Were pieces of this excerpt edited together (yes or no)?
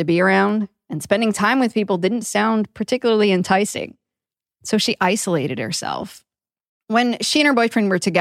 no